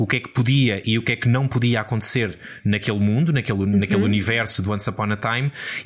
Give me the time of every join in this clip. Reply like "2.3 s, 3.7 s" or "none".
none

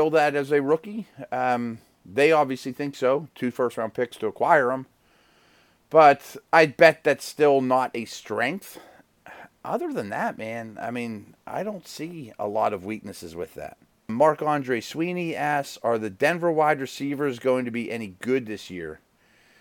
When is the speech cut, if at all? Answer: 14.1 s

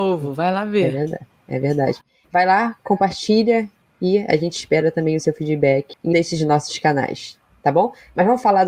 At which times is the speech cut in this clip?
2.2 s, 6.1 s

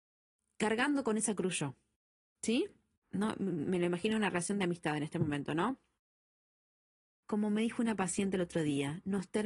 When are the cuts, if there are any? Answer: 3.0 s

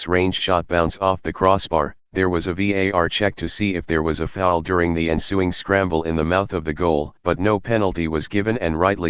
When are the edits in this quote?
none

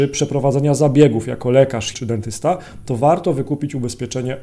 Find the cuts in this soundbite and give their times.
1.9 s

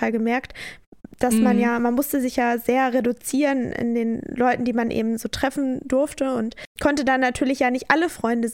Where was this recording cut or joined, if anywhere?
none

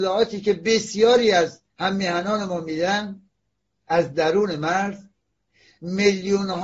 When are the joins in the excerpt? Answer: 1.7 s

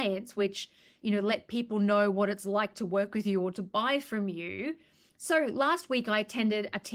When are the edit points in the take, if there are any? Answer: 5.1 s

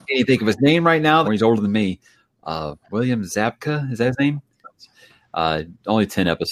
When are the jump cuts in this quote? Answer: 1.2 s, 4.6 s

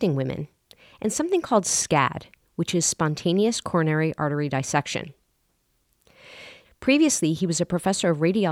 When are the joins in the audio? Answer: 6.6 s

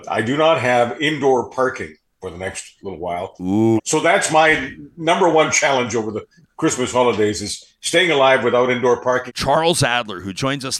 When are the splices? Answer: 3.8 s, 9.3 s

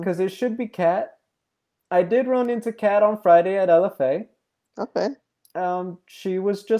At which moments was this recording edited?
none

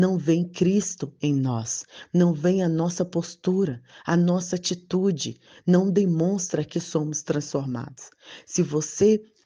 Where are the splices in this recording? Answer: 6.7 s

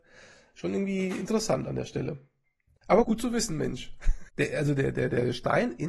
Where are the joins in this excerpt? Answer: 3.0 s, 4.3 s

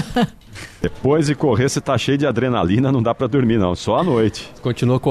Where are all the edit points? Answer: none

